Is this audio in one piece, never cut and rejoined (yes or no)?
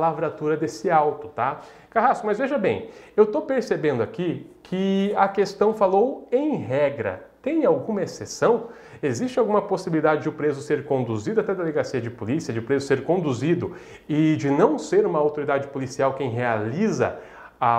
yes